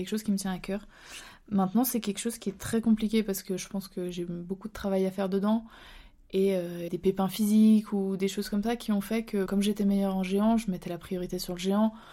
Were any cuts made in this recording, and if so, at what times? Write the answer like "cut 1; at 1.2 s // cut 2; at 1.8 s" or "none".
cut 1; at 6.9 s // cut 2; at 9.5 s